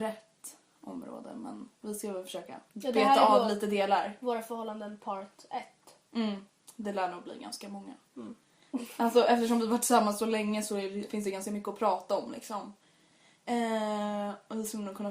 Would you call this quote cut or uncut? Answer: uncut